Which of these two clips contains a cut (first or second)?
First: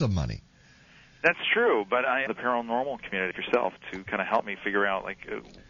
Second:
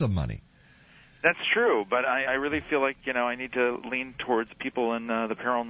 first